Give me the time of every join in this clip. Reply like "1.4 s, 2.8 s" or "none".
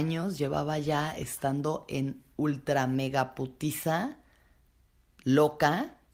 none

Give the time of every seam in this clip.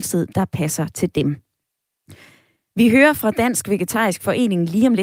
none

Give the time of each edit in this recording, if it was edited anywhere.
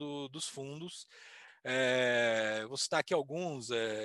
1.5 s

